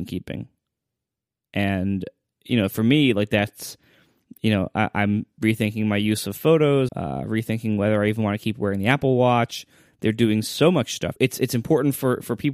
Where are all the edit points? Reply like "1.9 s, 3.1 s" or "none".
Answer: 6.9 s, 9.9 s, 11.2 s